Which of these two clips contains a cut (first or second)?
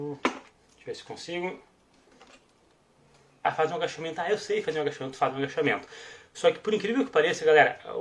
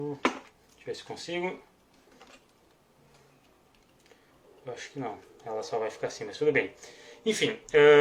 first